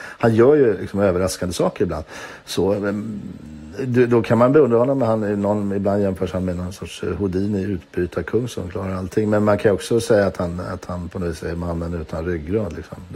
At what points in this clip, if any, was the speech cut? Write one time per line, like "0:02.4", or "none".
none

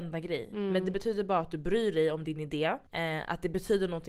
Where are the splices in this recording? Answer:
0:02.9

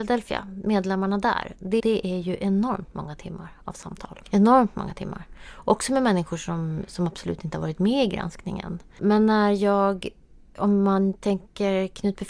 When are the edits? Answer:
0:01.8
0:09.0

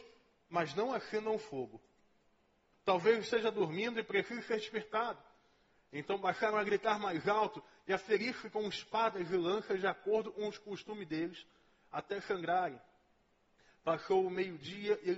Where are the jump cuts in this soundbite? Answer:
0:02.7

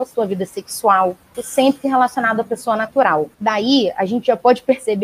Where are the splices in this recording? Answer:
0:01.3
0:03.3

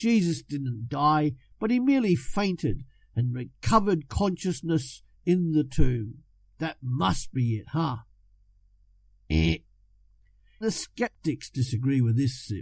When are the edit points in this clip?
0:10.6

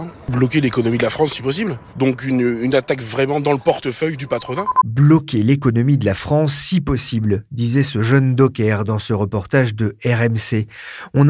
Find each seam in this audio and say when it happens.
none

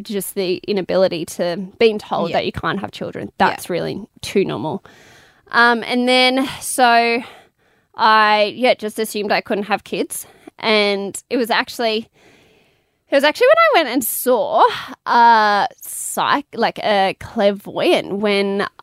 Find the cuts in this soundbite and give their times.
none

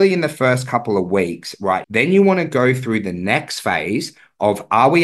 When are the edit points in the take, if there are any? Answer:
0:01.8

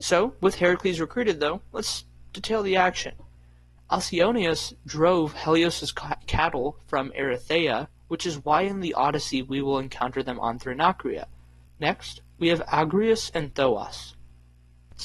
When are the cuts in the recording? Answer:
0:03.8
0:11.7

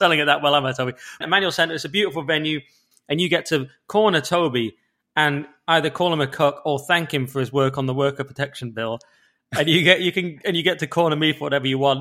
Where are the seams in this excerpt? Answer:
0:01.2
0:02.9

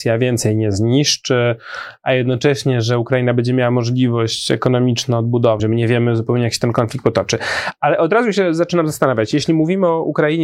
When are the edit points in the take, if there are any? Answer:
0:05.6

